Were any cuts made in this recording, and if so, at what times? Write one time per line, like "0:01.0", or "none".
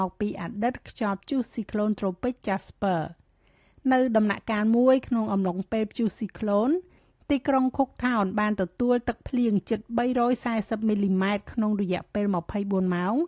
none